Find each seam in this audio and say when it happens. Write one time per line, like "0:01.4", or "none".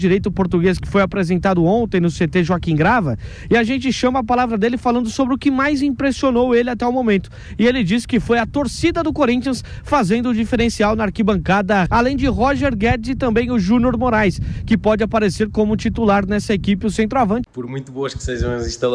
0:11.9
0:17.4